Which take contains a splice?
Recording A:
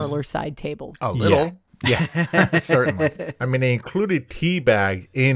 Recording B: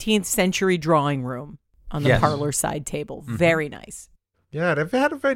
A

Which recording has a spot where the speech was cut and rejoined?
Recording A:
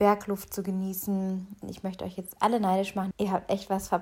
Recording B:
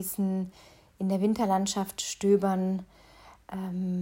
A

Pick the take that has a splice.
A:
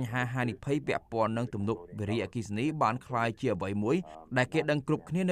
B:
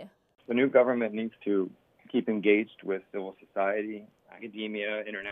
B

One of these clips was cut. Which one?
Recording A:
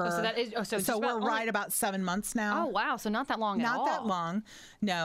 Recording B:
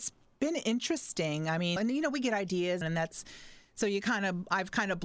B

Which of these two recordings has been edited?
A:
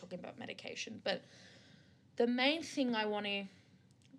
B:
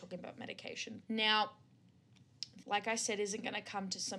B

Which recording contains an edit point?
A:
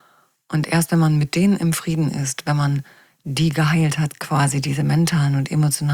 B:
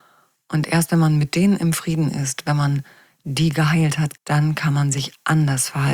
B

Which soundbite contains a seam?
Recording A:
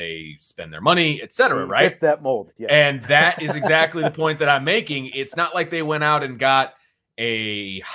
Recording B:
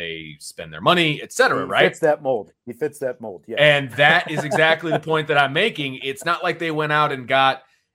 A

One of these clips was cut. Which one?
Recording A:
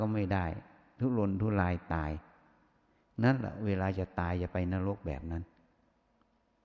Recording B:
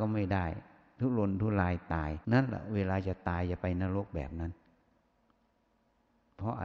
B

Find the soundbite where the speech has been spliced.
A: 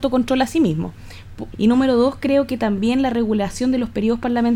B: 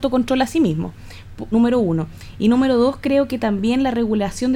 A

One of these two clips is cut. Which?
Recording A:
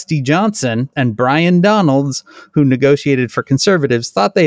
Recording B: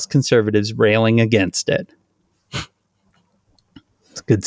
A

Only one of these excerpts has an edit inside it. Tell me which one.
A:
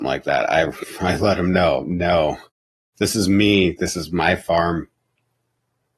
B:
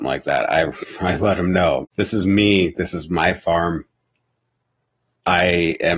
B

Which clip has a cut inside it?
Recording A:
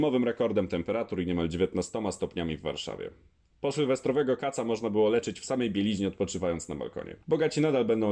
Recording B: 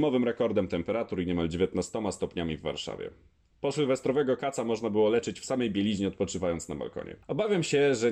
A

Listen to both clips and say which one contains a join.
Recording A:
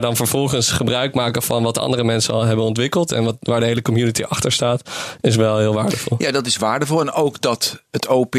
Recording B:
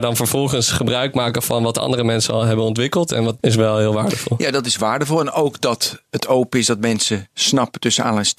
B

